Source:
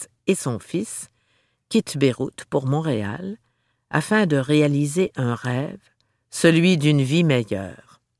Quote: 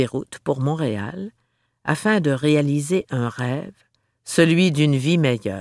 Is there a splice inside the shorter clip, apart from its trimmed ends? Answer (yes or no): no